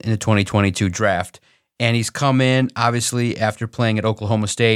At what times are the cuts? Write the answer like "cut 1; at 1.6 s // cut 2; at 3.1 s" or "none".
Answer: none